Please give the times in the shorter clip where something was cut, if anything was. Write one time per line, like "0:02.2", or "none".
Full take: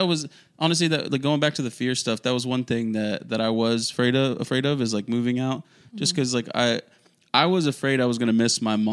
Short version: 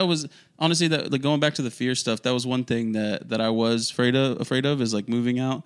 none